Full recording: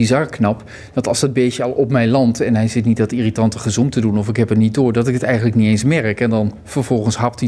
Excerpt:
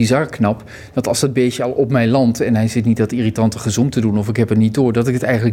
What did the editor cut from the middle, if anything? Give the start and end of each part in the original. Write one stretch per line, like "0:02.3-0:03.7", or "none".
none